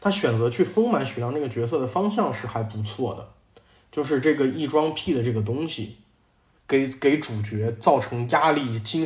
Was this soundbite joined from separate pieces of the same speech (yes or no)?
yes